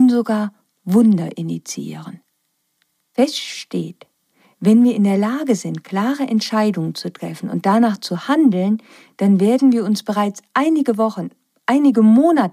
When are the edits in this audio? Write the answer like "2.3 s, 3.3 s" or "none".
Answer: none

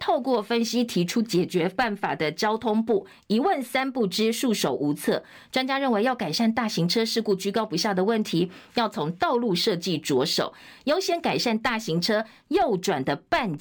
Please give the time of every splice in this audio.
none

